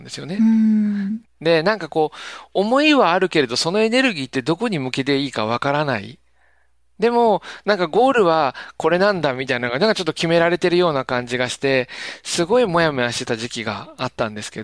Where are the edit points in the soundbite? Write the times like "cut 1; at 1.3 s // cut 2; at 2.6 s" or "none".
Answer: cut 1; at 1.2 s